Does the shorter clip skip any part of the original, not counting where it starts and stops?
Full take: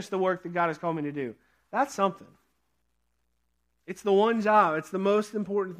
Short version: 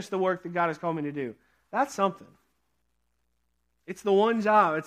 no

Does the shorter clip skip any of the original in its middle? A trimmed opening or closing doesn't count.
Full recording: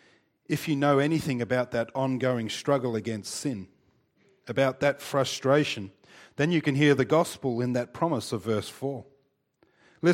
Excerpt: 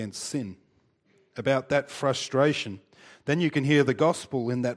no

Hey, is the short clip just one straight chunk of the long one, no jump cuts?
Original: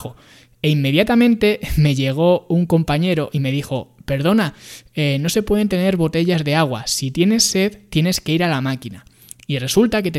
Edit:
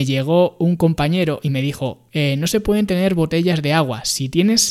no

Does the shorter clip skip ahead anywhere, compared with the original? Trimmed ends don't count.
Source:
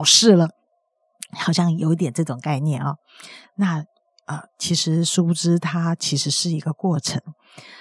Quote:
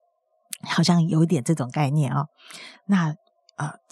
no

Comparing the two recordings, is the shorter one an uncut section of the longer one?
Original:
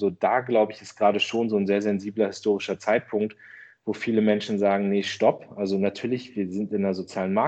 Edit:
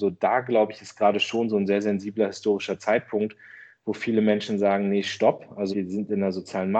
no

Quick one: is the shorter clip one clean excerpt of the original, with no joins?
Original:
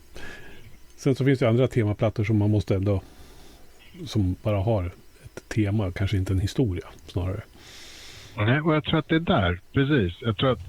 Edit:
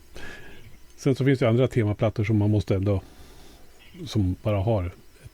yes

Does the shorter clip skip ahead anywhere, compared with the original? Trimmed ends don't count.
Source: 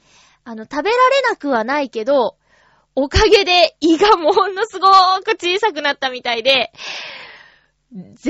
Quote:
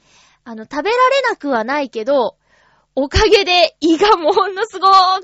no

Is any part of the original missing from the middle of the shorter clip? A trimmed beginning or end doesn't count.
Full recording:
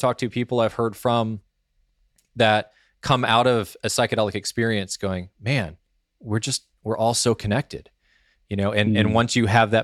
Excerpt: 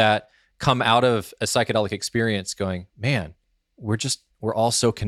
no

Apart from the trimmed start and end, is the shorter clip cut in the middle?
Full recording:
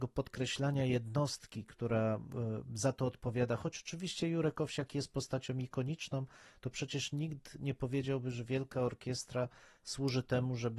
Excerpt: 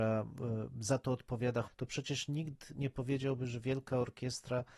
yes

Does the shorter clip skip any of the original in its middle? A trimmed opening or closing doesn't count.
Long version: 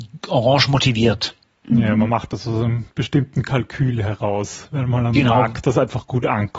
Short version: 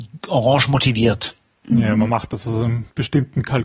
no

